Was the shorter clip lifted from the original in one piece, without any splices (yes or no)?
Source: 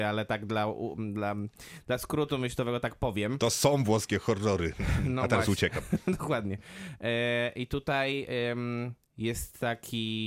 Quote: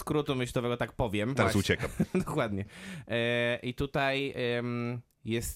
no